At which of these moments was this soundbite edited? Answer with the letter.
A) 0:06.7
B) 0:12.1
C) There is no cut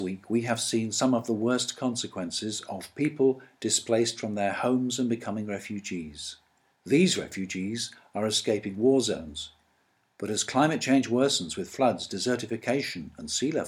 A